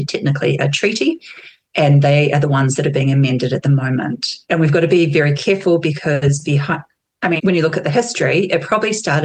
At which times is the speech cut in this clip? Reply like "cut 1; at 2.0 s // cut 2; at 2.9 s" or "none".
cut 1; at 4.4 s // cut 2; at 7.4 s